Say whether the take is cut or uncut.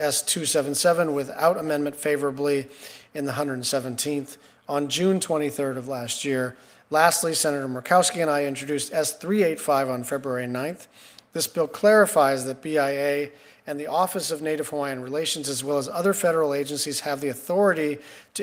uncut